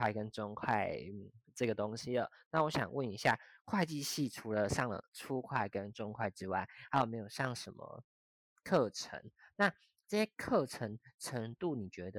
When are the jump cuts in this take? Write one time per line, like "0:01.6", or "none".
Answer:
none